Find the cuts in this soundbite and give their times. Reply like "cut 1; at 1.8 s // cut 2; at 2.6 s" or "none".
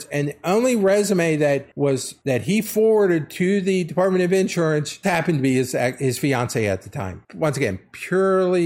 cut 1; at 5.0 s